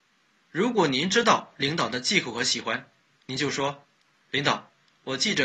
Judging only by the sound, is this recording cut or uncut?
uncut